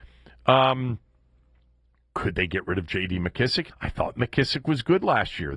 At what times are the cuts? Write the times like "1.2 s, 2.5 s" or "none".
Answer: 3.7 s